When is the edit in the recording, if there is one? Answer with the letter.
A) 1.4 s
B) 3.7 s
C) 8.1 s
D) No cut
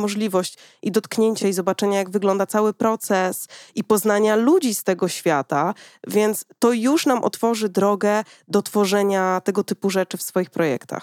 D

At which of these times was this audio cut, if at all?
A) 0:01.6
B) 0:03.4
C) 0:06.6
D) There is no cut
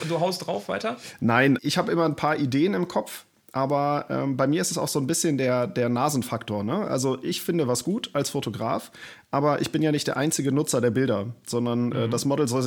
A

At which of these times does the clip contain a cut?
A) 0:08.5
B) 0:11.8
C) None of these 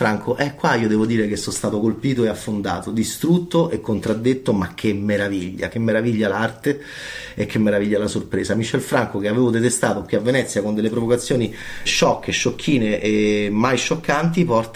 B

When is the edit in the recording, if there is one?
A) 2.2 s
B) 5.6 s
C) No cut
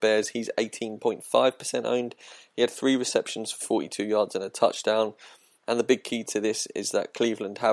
B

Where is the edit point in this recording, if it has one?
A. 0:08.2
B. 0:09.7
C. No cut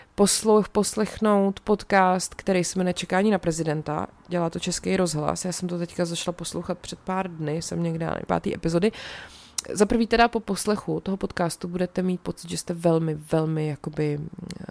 A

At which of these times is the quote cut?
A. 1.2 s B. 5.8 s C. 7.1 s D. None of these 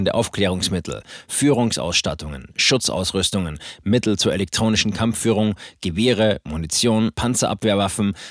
C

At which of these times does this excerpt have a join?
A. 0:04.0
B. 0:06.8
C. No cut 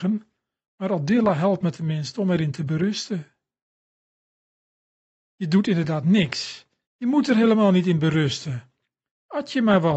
B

